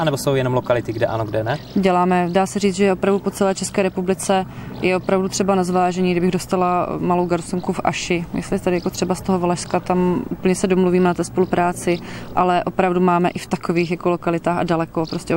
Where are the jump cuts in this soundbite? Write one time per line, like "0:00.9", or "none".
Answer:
none

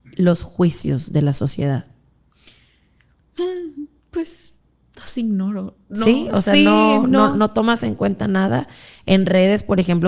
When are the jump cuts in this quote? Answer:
none

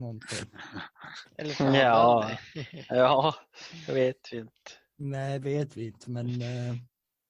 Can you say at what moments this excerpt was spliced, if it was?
none

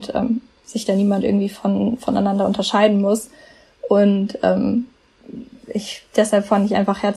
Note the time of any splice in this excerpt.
none

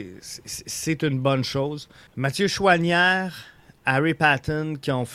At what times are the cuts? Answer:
0:02.1

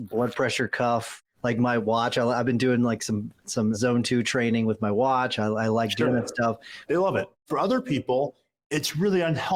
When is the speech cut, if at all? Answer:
0:03.7
0:06.9

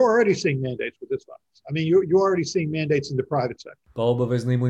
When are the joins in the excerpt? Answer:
none

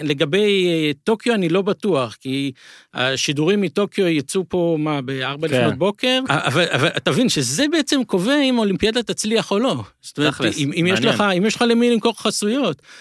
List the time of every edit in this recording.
0:06.3

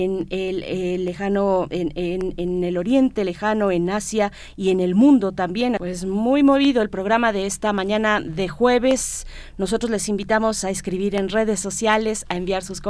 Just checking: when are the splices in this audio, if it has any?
0:05.8

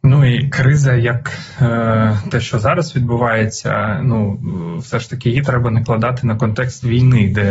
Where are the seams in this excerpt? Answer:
none

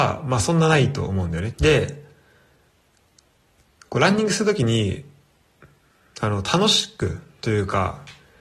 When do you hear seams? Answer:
0:01.5

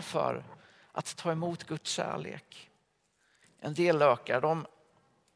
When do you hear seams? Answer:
0:03.4

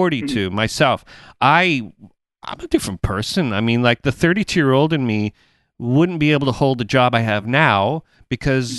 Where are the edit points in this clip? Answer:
none

